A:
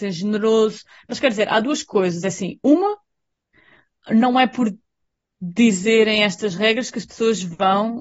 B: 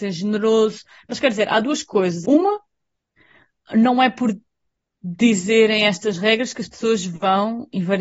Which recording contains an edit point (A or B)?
B